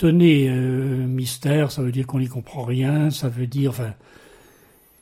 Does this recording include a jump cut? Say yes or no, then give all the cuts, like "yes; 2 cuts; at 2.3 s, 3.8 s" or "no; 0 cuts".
no; 0 cuts